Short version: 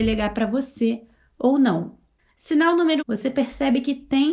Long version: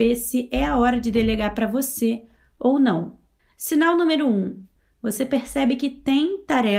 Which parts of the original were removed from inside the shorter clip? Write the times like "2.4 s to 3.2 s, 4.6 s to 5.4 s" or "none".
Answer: 4.2 s to 4.9 s